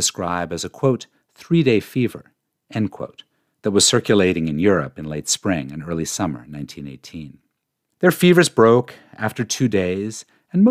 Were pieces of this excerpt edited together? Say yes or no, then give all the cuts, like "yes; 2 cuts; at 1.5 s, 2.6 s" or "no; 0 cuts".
yes; 1 cut; at 7.9 s